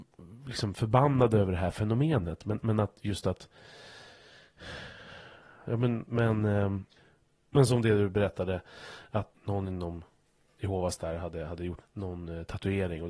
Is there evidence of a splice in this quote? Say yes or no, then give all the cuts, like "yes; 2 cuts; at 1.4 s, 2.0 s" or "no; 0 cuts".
yes; 2 cuts; at 9.3 s, 11.8 s